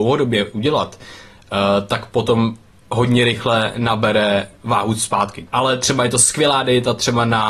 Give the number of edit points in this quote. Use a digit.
1